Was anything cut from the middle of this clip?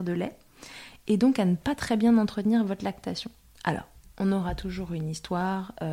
no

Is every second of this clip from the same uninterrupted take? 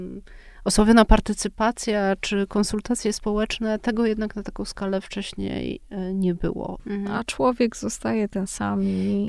no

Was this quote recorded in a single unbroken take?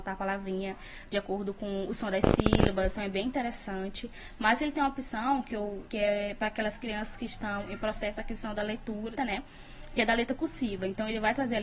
no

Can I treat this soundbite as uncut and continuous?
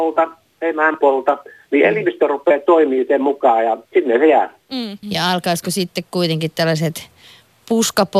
no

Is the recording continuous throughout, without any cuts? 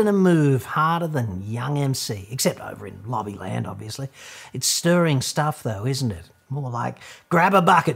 no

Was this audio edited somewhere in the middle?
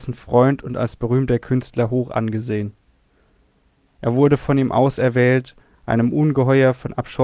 yes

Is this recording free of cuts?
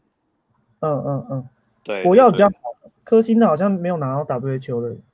no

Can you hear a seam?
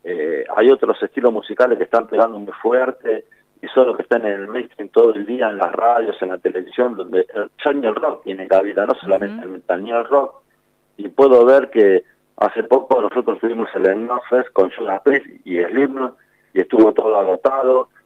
no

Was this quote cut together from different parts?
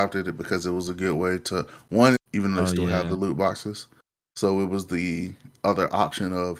yes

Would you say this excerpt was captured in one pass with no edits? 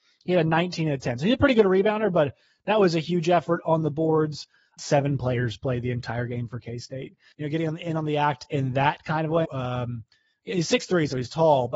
no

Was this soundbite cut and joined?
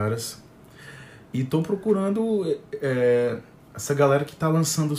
no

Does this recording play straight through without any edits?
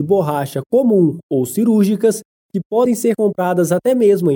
yes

